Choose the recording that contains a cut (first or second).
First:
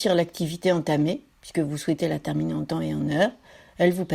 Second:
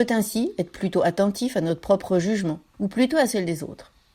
second